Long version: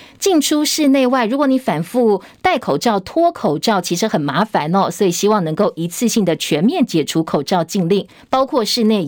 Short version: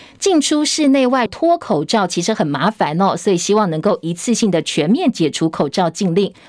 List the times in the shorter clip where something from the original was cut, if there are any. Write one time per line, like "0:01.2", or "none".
0:01.3

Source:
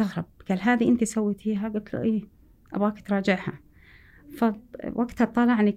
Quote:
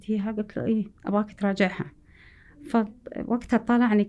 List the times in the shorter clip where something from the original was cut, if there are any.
0:01.0

